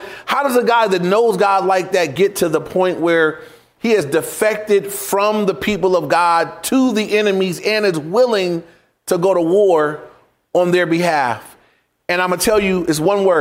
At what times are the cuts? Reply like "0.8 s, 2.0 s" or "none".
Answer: none